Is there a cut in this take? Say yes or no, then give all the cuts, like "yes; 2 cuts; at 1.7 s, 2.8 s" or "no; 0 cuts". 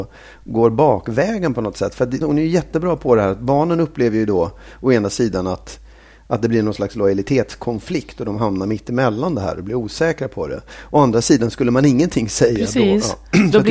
yes; 1 cut; at 2.2 s